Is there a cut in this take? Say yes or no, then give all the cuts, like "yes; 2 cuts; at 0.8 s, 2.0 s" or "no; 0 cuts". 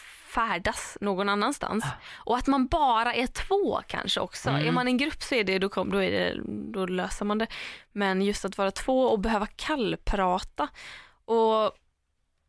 no; 0 cuts